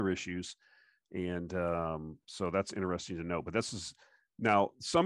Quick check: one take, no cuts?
yes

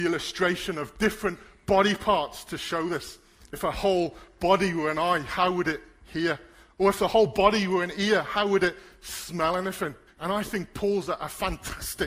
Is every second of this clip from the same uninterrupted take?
no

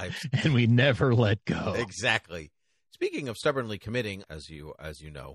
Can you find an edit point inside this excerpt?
yes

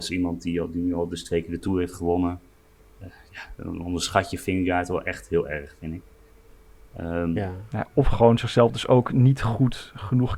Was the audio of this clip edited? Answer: no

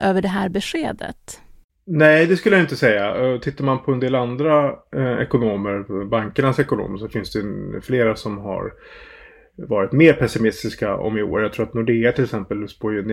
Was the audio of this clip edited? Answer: no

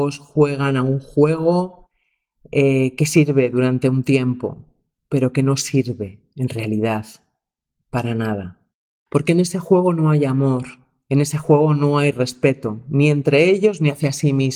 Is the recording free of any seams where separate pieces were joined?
yes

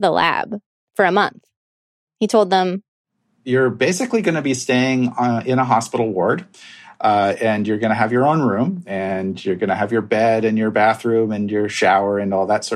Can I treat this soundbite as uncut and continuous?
yes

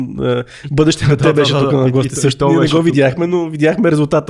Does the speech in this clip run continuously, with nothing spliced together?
yes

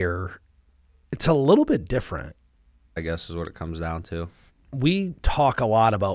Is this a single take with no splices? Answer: no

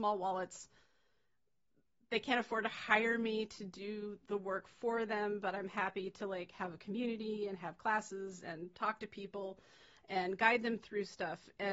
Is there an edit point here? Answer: no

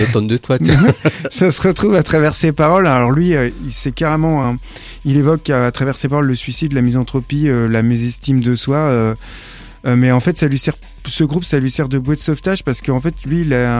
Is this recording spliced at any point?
no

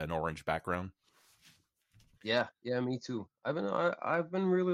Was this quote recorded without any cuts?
no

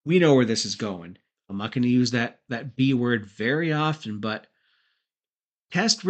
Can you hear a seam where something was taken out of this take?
yes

